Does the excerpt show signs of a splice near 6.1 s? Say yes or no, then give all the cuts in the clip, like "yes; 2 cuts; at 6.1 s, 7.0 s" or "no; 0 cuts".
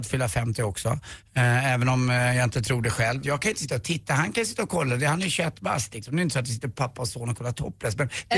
no; 1 cut; at 3.2 s